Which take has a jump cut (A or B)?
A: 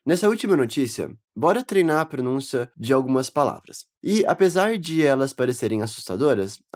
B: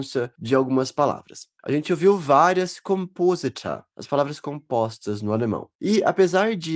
A